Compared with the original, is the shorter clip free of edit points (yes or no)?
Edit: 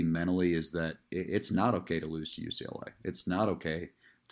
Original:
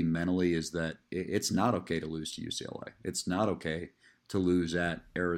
yes